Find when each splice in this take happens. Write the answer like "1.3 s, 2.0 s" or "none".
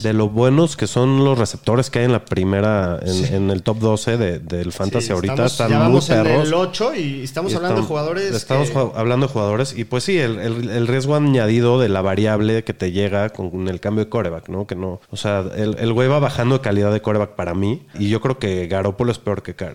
15.0 s, 17.9 s